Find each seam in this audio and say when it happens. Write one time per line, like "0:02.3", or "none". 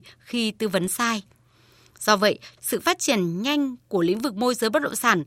0:02.6

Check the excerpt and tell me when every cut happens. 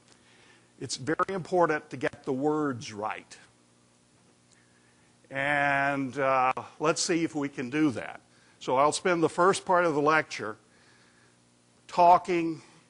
none

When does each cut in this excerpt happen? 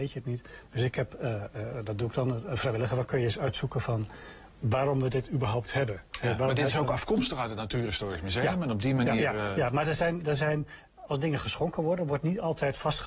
none

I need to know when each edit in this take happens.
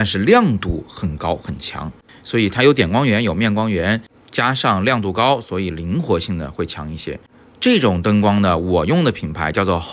0:02.1

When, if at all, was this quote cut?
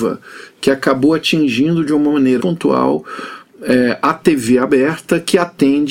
0:02.4

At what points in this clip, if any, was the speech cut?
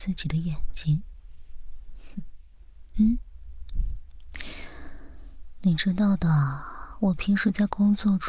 0:02.9

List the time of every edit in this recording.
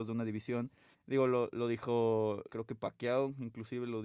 0:00.9
0:02.5

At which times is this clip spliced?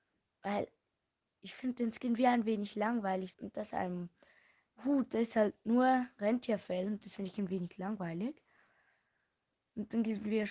0:03.3

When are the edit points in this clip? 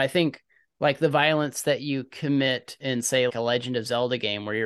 0:03.3

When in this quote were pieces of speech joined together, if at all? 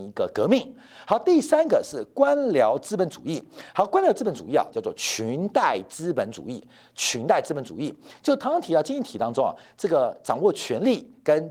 0:04.7

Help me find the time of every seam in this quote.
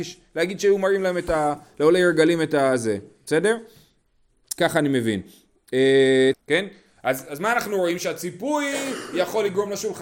0:04.6
0:06.3

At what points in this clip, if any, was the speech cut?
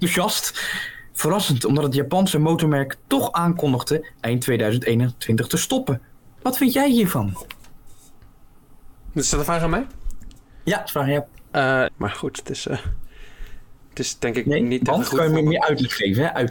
0:11.9

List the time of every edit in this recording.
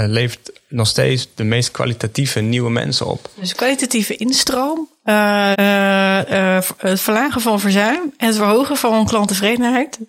0:05.5

